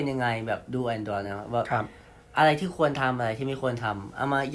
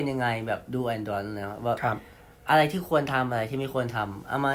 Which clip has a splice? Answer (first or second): first